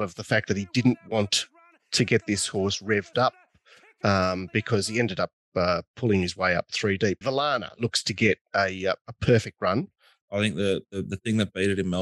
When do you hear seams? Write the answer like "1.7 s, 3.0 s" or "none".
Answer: 7.2 s, 10.2 s